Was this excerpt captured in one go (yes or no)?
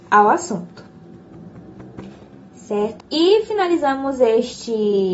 no